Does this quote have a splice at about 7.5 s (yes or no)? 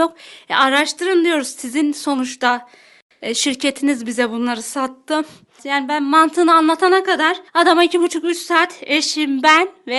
yes